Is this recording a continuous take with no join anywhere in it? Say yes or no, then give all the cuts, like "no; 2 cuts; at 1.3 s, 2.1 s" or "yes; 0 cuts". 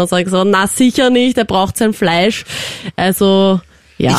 yes; 0 cuts